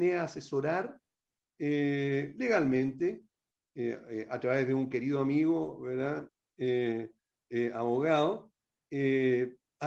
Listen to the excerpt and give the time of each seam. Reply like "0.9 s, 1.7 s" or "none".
none